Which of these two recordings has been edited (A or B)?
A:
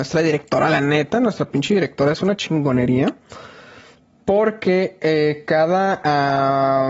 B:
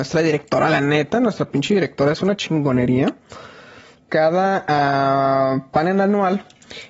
B